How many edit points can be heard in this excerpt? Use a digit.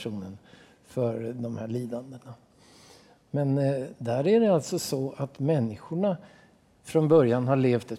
1